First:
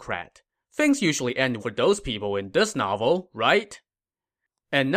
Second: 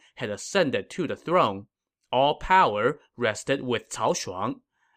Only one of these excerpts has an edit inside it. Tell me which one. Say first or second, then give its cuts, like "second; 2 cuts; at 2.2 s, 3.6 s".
first; 1 cut; at 1.6 s